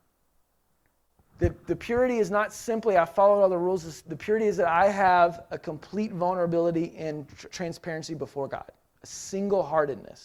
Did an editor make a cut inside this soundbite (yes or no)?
yes